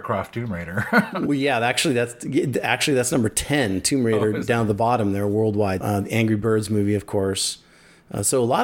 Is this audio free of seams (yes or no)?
no